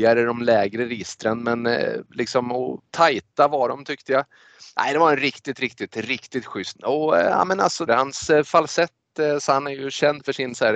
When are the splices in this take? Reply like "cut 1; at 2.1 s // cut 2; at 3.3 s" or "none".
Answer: cut 1; at 6.7 s // cut 2; at 7.9 s